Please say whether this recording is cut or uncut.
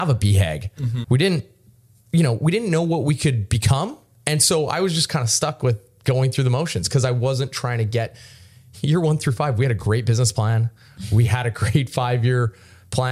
cut